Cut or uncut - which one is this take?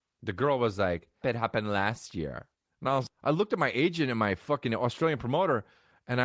cut